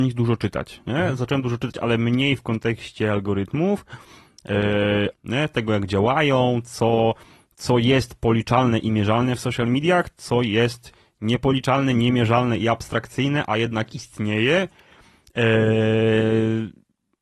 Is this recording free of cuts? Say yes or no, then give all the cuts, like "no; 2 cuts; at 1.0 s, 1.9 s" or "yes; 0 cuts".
no; 1 cut; at 5.1 s